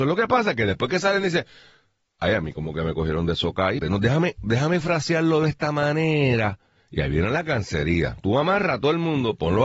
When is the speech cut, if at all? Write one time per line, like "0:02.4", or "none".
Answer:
0:03.8